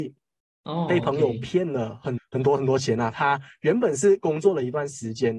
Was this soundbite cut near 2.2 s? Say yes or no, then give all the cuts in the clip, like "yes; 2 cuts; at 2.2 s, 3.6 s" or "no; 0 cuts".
yes; 1 cut; at 2.2 s